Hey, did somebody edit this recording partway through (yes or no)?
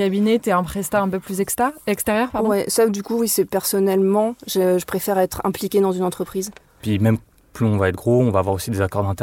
no